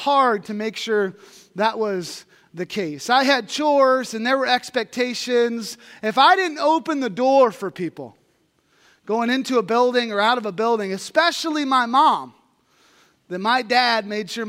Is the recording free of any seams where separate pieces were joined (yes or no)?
yes